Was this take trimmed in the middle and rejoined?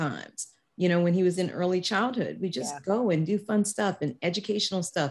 no; 0 cuts

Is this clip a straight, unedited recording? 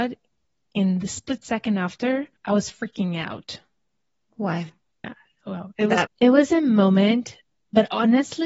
no; 3 cuts; at 2.4 s, 5.0 s, 6.1 s

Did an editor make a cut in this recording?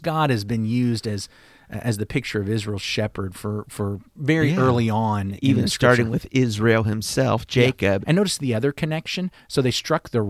yes; 2 cuts; at 4.1 s, 8.0 s

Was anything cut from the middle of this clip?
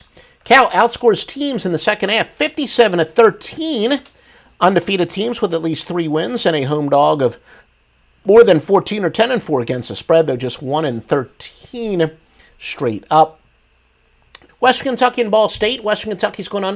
yes; 1 cut; at 14.5 s

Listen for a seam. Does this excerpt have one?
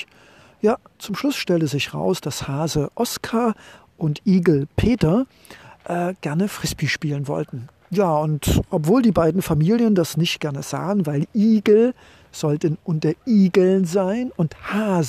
no; 0 cuts

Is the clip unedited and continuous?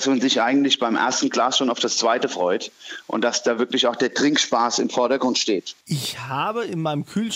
no; 1 cut; at 5.8 s

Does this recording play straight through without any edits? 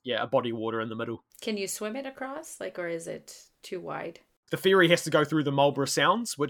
no; 2 cuts; at 1.3 s, 4.5 s

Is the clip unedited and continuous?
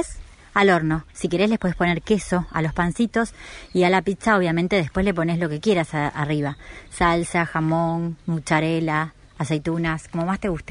yes; 0 cuts

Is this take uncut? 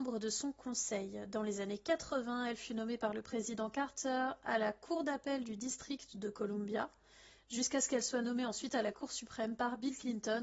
yes; 0 cuts

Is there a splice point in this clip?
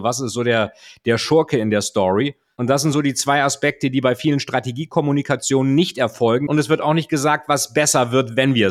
yes; 1 cut; at 6.5 s

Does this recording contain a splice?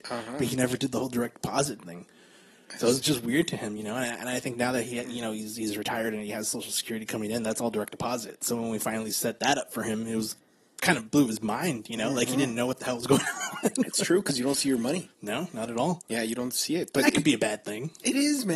no; 0 cuts

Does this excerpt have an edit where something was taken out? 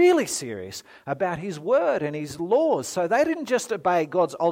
no; 0 cuts

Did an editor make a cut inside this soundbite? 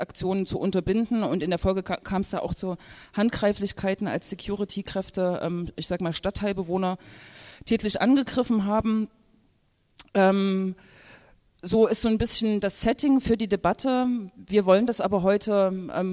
no; 0 cuts

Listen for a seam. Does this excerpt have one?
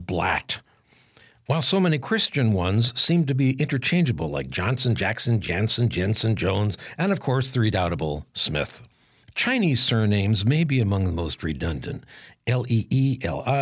no; 0 cuts

